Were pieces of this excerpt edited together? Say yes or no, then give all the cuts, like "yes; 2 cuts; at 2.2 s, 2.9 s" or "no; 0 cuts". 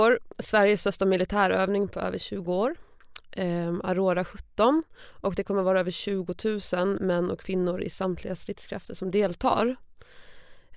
no; 0 cuts